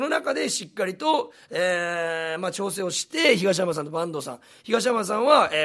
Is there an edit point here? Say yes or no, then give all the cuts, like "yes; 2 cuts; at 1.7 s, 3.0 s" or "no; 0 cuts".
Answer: no; 0 cuts